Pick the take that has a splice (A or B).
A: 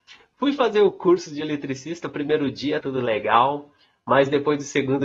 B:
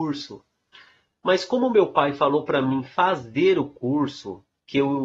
A